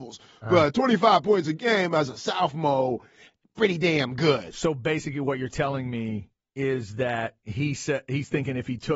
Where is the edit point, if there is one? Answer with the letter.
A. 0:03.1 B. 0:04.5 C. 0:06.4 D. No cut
D